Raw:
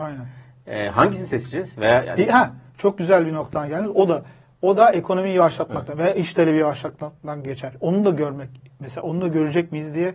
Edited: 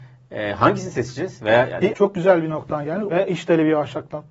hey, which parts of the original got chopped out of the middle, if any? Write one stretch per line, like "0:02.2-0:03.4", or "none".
0:02.3-0:02.7
0:03.9-0:06.0